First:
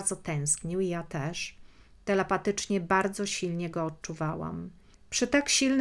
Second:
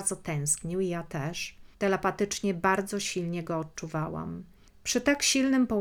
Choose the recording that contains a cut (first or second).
second